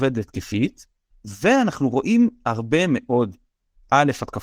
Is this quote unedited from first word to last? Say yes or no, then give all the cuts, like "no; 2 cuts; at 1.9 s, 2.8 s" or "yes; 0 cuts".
no; 1 cut; at 1.1 s